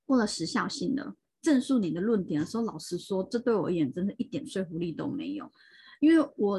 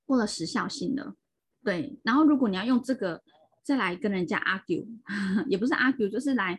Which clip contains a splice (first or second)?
first